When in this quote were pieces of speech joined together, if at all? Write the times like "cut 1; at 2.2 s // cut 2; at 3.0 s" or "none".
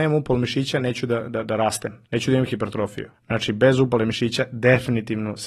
cut 1; at 2.0 s // cut 2; at 3.1 s

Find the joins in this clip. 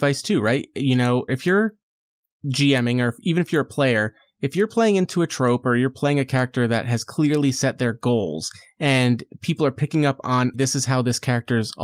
cut 1; at 1.3 s // cut 2; at 10.5 s

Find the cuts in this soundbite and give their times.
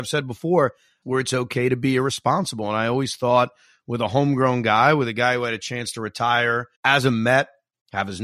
cut 1; at 1.0 s // cut 2; at 6.7 s

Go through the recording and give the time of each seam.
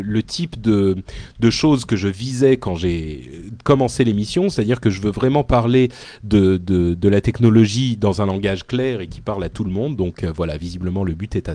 none

